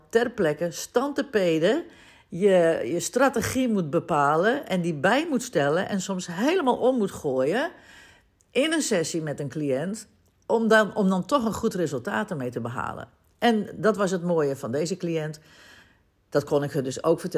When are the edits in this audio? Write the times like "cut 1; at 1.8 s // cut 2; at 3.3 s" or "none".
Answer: none